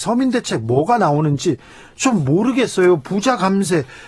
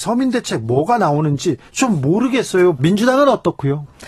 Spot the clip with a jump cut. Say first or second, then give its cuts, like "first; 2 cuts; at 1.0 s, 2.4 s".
second; 2 cuts; at 1.7 s, 2.8 s